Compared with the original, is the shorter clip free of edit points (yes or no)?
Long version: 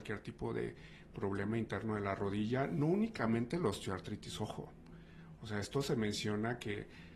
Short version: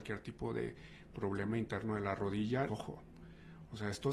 no